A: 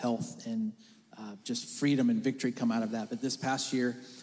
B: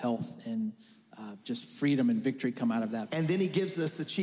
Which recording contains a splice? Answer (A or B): B